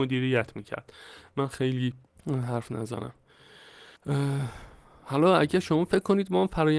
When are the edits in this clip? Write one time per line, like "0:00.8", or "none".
0:04.0